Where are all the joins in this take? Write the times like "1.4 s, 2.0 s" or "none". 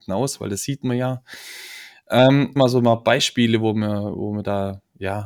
2.6 s